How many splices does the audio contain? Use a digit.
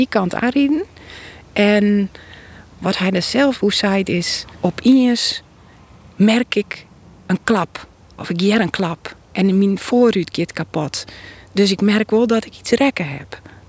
0